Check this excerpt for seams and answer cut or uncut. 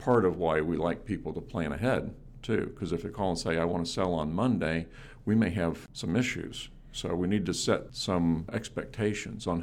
uncut